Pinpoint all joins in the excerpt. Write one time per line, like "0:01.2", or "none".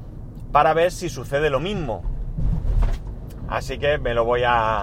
0:03.4